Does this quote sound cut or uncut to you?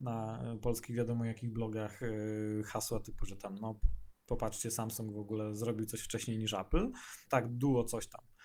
cut